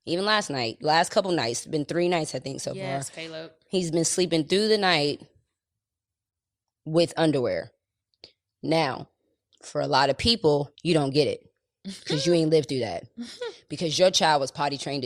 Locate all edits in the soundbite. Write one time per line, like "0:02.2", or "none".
0:10.7